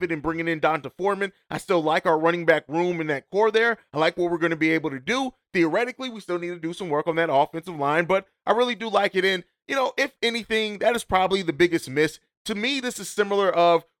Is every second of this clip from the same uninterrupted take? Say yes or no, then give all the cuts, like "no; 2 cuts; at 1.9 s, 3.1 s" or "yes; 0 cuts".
yes; 0 cuts